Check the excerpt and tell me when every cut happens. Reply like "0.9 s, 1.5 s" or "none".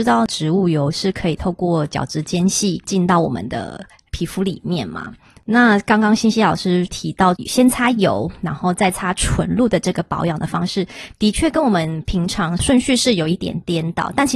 none